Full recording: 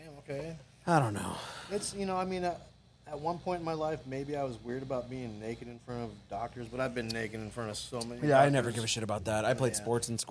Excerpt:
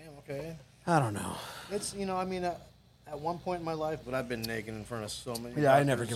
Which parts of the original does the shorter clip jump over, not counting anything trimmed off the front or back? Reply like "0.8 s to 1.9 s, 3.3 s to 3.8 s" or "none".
4.0 s to 6.7 s